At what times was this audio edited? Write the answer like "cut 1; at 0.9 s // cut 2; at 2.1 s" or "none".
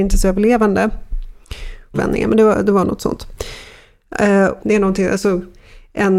cut 1; at 1.9 s // cut 2; at 4.6 s